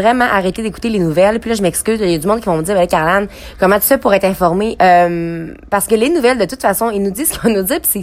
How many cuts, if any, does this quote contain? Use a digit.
1